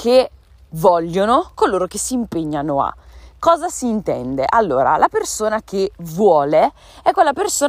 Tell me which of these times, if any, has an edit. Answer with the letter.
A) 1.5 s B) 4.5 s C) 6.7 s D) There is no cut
A